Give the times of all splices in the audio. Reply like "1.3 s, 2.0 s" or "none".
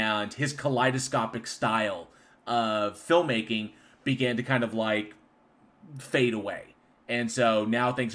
none